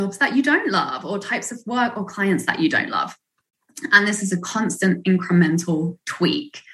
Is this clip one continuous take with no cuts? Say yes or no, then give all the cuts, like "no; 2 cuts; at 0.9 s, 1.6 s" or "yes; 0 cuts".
yes; 0 cuts